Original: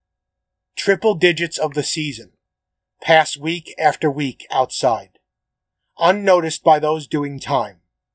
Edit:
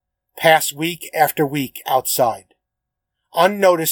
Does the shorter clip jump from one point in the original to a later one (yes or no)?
no